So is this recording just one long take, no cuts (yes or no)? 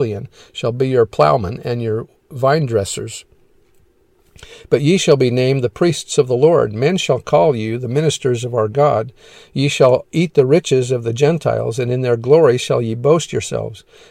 yes